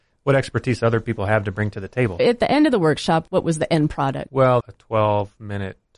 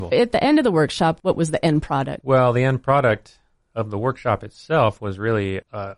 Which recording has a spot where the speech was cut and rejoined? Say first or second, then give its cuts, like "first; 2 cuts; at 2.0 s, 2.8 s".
first; 1 cut; at 4.6 s